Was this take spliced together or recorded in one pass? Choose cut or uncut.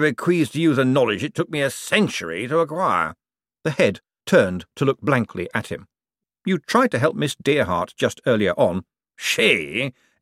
cut